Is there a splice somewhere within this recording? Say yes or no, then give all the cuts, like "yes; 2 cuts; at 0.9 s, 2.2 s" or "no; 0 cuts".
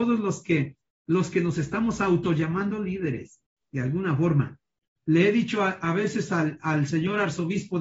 yes; 1 cut; at 4.9 s